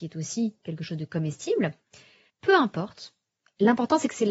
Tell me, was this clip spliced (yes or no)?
yes